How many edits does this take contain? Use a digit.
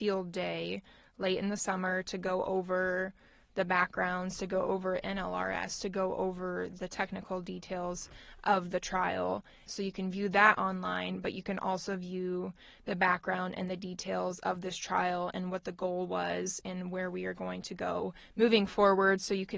1